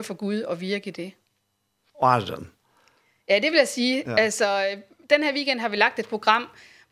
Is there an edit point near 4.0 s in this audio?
no; 1 cut; at 1.9 s

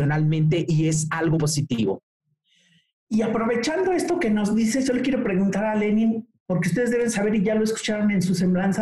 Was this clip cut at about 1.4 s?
yes; 1 cut; at 1.4 s

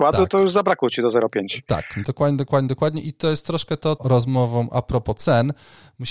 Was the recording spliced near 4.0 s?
yes; 2 cuts; at 2.0 s, 4.0 s

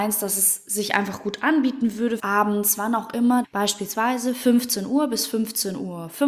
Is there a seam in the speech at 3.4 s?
yes; 2 cuts; at 2.2 s, 3.4 s

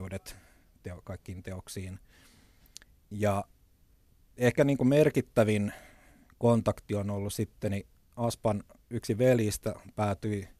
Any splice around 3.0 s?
no; 0 cuts

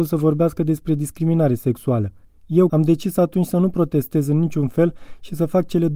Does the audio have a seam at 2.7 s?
yes; 1 cut; at 2.7 s

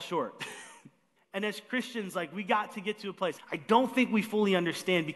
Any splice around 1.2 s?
yes; 2 cuts; at 1.2 s, 3.4 s

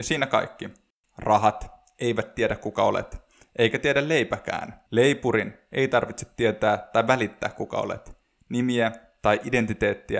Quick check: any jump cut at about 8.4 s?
no; 1 cut; at 4.9 s

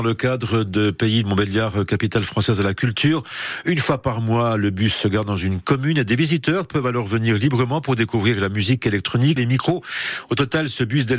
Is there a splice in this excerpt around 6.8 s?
no; 1 cut; at 9.4 s

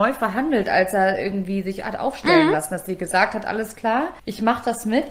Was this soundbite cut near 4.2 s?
yes; 1 cut; at 4.2 s

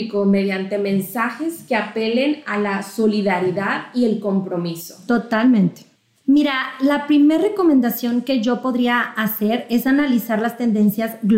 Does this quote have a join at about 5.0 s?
no; 1 cut; at 6.2 s

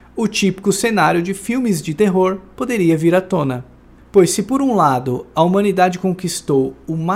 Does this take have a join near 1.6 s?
no; 1 cut; at 4.0 s

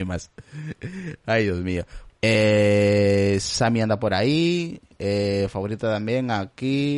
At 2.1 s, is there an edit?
yes; 1 cut; at 2.1 s

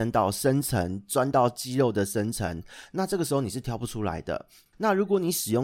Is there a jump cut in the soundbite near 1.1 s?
no; 1 cut; at 4.7 s

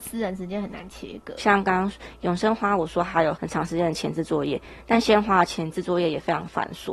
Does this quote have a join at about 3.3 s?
yes; 2 cuts; at 1.4 s, 3.3 s

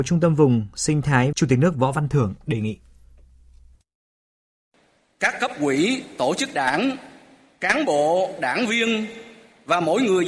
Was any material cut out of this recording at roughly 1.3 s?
yes; 1 cut; at 1.3 s

